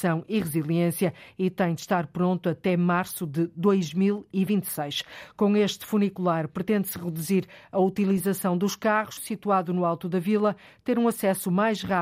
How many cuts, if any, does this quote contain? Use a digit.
1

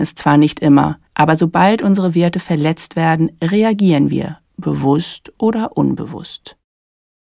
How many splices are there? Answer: 1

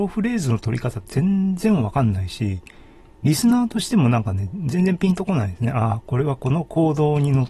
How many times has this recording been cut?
0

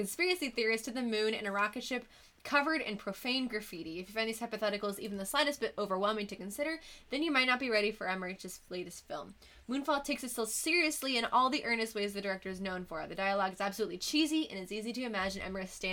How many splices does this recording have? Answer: 0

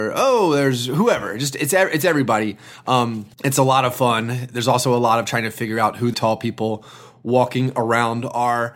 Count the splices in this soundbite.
2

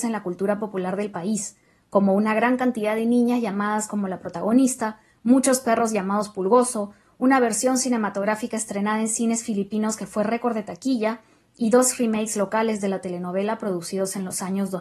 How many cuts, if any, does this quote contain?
0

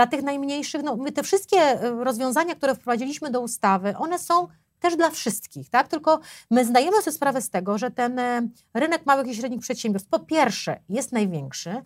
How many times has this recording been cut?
0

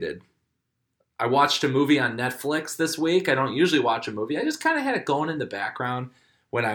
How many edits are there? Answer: 0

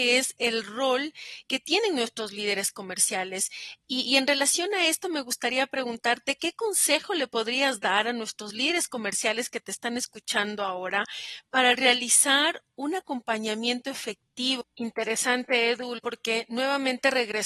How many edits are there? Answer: 2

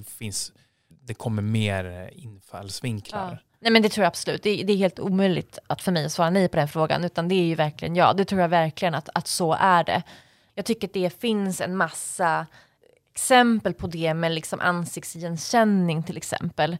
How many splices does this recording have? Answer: 1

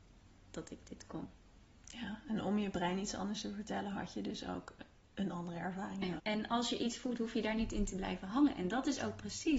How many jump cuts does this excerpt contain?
1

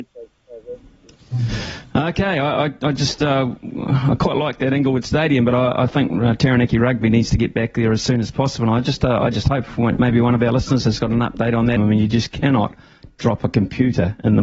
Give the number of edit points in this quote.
1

